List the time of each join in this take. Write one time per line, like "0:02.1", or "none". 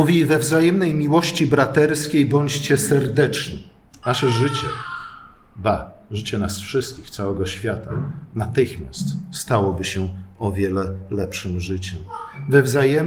0:04.0